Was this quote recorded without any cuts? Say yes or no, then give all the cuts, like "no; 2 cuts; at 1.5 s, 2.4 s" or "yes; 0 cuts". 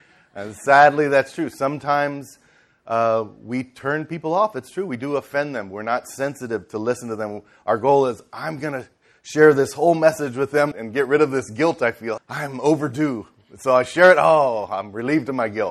no; 2 cuts; at 10.7 s, 12.2 s